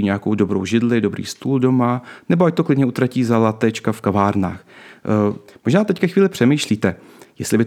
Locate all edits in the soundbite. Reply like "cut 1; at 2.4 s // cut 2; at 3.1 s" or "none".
cut 1; at 5.5 s